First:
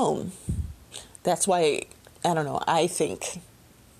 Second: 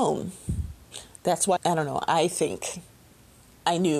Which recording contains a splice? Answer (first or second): second